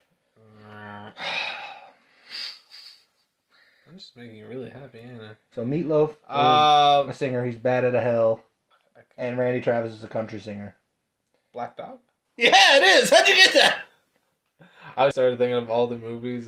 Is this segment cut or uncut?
cut